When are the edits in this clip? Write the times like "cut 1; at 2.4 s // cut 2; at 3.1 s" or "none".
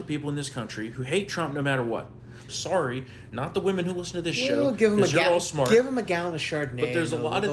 cut 1; at 2.5 s